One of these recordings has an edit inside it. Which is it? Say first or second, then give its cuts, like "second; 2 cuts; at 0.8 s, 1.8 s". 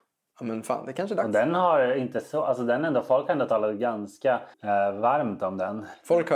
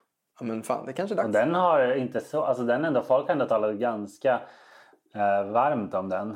first; 1 cut; at 4.5 s